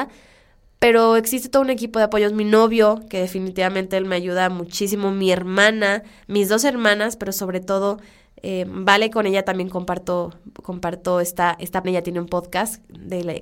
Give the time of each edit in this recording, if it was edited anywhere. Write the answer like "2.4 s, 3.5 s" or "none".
11.8 s